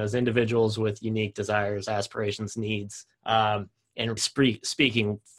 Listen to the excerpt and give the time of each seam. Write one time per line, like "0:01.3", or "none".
0:03.1
0:04.2